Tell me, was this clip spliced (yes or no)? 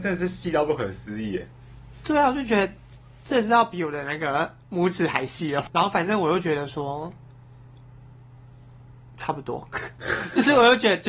yes